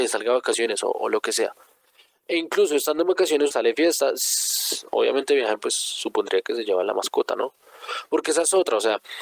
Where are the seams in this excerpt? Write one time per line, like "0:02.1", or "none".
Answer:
0:03.5